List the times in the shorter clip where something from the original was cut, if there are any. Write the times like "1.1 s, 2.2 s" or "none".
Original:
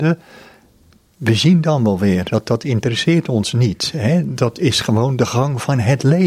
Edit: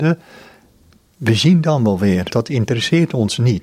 2.3 s

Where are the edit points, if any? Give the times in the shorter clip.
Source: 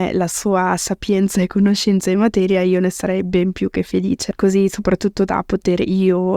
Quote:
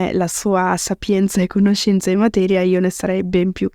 none

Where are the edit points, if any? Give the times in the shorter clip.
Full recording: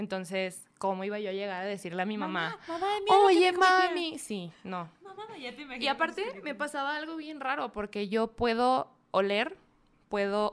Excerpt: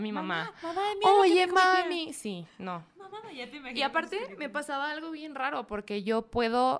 none

